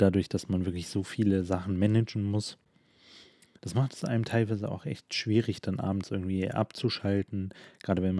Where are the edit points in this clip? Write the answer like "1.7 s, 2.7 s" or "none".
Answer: 3.6 s